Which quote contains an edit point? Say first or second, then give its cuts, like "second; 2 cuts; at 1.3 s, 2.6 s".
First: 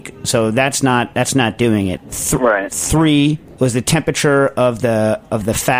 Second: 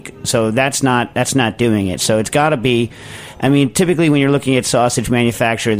first; 1 cut; at 2.0 s